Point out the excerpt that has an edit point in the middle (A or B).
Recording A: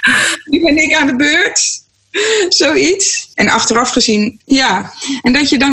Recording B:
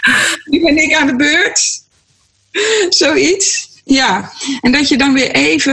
A